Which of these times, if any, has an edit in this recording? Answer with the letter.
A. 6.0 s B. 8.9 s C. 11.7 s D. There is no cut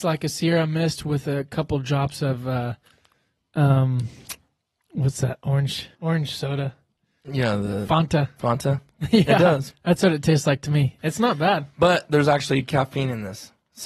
A